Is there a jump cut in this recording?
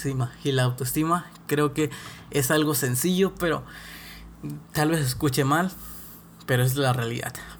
no; 0 cuts

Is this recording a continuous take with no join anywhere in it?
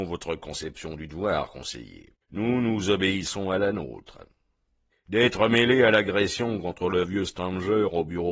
no; 2 cuts; at 2.2 s, 4.9 s

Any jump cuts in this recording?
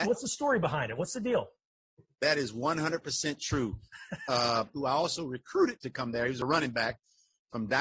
yes; 1 cut; at 4.7 s

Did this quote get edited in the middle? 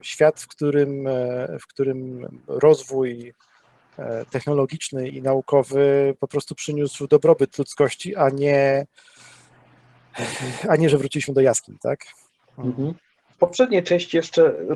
yes; 1 cut; at 5.1 s

